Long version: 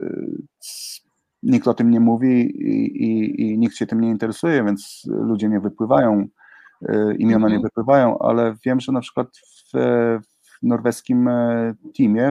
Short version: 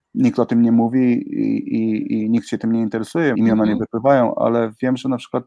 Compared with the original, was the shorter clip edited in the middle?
yes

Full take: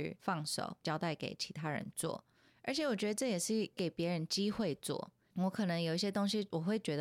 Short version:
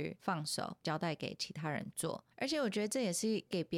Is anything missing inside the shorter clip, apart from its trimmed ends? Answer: yes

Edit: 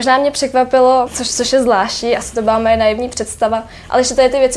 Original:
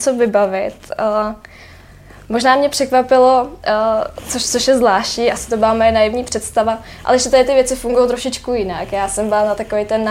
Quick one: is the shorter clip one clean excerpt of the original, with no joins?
no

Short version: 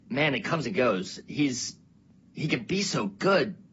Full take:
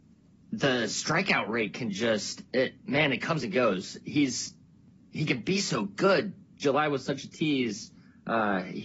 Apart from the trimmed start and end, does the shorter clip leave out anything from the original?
no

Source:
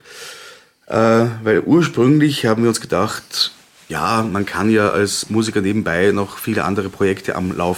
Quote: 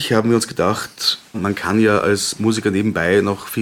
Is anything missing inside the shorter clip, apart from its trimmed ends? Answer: yes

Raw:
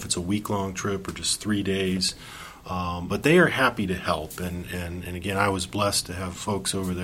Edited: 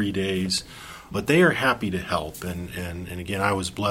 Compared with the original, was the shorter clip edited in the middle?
yes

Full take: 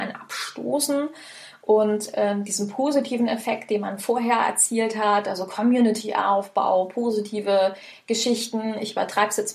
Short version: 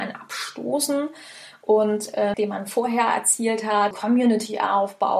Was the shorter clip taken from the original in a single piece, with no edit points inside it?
no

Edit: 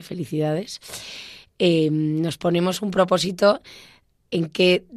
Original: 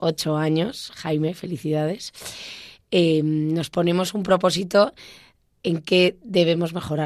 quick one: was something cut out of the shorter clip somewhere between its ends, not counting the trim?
no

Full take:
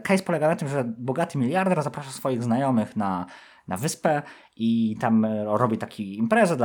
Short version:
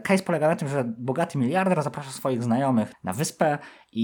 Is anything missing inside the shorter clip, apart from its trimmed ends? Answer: yes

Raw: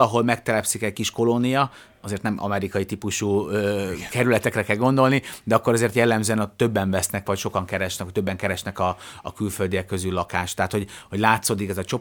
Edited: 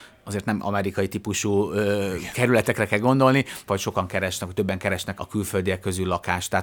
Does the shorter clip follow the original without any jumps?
no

